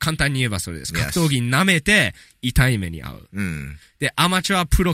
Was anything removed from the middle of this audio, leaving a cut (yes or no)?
no